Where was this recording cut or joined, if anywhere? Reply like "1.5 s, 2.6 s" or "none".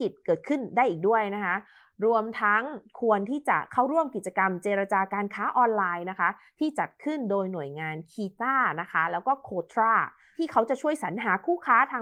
none